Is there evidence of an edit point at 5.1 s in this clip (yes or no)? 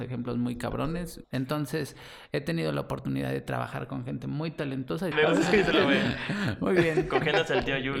yes